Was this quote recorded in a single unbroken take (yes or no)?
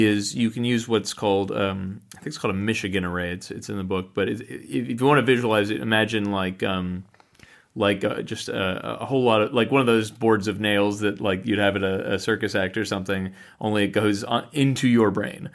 yes